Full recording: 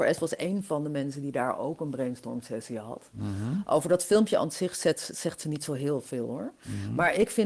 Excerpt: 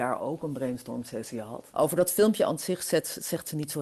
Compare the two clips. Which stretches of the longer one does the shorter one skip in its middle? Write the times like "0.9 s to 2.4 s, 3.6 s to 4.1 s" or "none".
3.1 s to 3.6 s